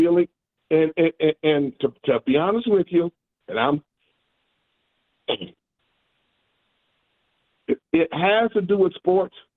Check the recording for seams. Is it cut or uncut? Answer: uncut